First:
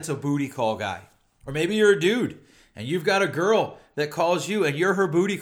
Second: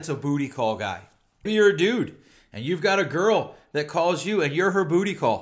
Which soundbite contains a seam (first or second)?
second